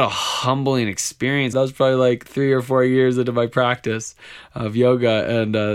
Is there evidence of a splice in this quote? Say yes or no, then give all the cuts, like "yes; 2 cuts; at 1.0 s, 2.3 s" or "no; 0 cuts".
yes; 1 cut; at 1.5 s